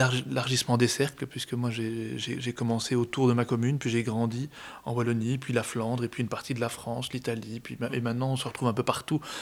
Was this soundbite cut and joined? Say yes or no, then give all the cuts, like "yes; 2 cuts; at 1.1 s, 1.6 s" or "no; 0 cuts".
no; 0 cuts